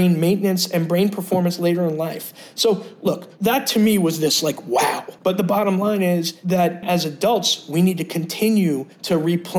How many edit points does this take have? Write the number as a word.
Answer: two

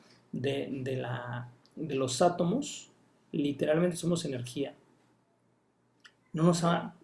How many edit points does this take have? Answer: one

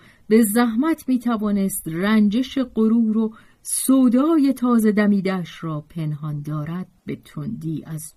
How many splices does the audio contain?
one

